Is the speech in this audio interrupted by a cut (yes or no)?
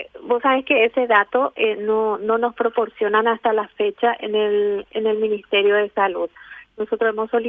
no